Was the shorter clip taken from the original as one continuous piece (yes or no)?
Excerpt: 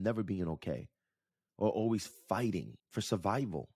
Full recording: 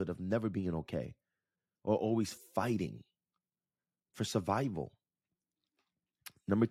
no